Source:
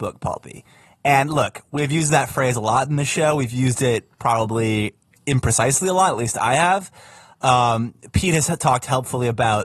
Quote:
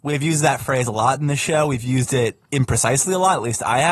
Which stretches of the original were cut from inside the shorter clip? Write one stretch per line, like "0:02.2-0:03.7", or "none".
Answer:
0:04.2-0:05.2